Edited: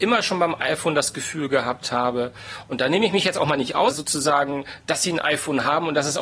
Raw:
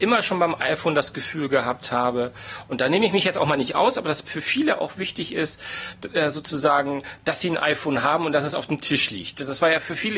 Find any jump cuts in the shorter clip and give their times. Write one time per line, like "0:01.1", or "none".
0:03.9